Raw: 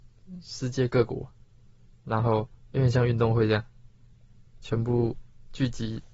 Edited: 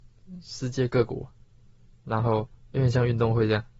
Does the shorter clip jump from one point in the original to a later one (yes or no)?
no